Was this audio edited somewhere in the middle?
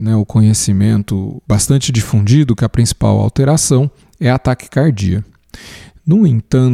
yes; 1 cut; at 1.4 s

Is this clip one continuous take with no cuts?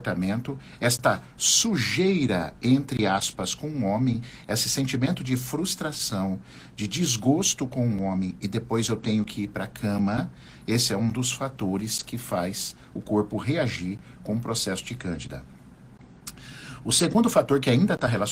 yes; 0 cuts

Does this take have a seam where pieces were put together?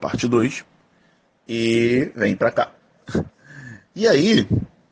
yes; 1 cut; at 3.9 s

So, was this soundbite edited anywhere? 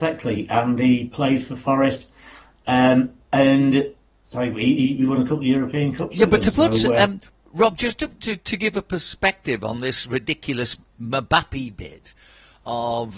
no; 0 cuts

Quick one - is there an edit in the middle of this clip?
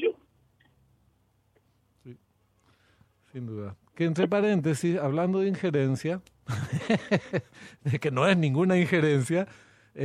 no; 0 cuts

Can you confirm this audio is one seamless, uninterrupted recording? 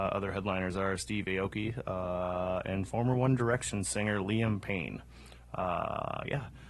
no; 1 cut; at 3.4 s

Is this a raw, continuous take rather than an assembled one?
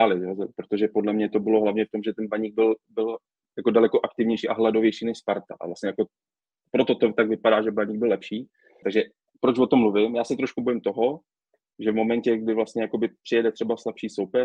no; 1 cut; at 8.8 s

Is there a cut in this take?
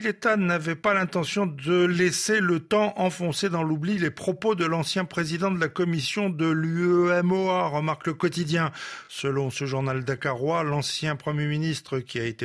no; 0 cuts

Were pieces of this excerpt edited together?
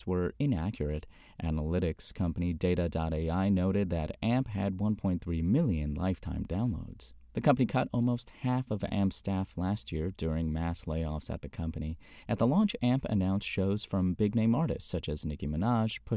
yes; 1 cut; at 12.2 s

